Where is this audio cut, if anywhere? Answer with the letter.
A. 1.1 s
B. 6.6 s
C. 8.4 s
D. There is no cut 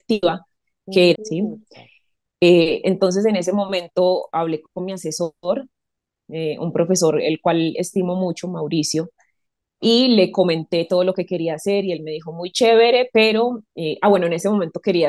A